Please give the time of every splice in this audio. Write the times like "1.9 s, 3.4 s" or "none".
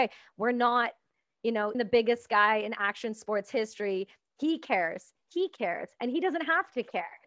1.7 s